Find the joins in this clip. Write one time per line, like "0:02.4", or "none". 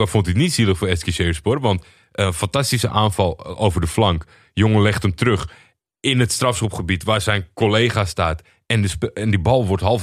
none